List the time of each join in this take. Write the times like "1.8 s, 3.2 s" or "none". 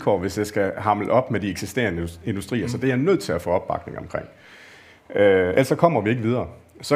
none